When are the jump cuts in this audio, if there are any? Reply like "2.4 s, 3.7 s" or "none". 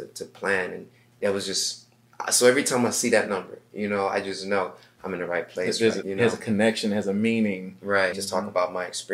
6.0 s, 8.1 s